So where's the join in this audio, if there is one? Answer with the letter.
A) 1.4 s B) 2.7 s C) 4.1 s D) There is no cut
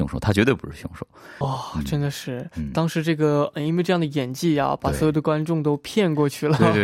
A